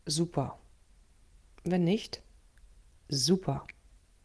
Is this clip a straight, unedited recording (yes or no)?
yes